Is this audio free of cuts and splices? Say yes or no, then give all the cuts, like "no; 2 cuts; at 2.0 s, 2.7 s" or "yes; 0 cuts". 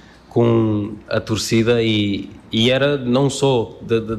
yes; 0 cuts